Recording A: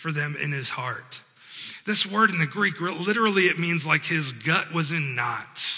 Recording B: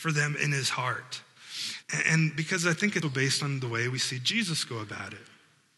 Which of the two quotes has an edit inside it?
B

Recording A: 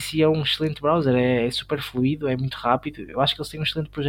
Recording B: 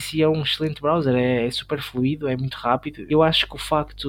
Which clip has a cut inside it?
B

